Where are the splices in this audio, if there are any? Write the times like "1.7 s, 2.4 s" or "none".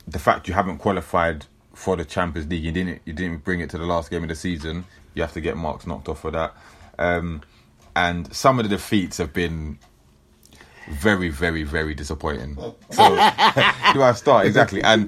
12.9 s, 13.9 s